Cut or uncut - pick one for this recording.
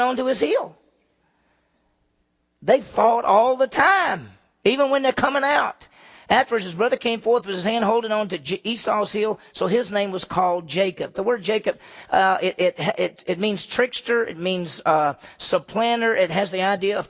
uncut